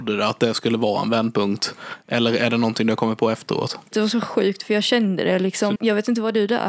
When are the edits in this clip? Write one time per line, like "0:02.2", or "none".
0:03.9
0:05.8

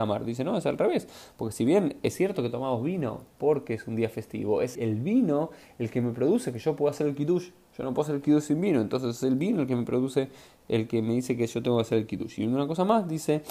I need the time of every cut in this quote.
0:04.7

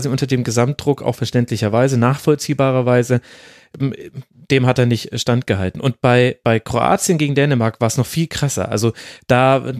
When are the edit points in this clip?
none

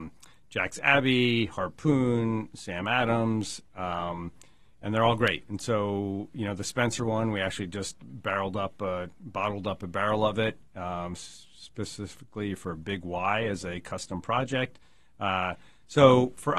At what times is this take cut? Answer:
none

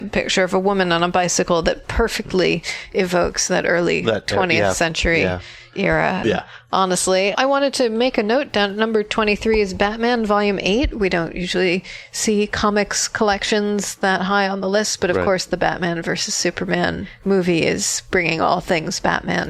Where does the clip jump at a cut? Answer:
0:06.2
0:07.3

